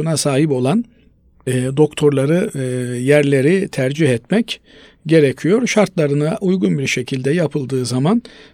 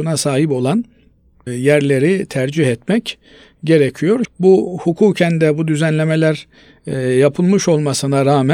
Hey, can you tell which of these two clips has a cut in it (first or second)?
second